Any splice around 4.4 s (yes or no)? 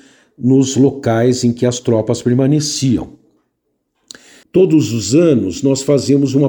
yes